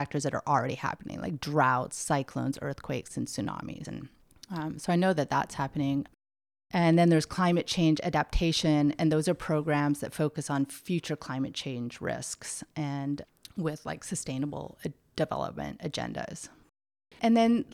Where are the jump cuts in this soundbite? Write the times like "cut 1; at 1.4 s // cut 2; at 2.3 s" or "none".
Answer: cut 1; at 3.8 s